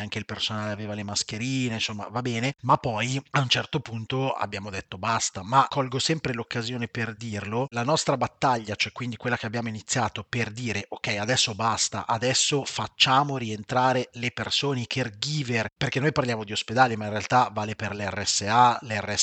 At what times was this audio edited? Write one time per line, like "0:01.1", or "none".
none